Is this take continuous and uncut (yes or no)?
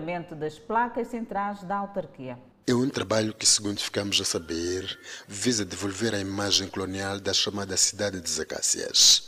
no